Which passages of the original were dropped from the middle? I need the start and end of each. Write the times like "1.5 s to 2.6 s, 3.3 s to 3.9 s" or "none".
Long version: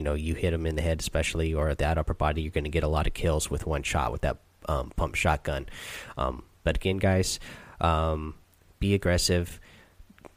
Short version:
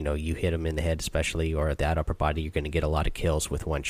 none